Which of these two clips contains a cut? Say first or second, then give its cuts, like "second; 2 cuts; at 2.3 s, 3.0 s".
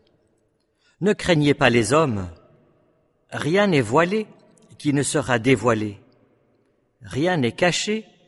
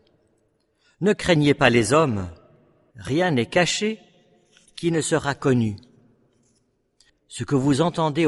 second; 2 cuts; at 2.9 s, 7.1 s